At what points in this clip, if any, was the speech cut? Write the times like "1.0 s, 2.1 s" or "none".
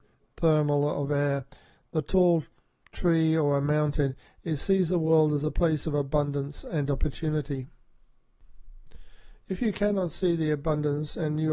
none